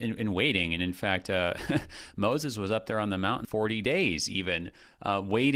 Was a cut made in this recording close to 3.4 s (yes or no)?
yes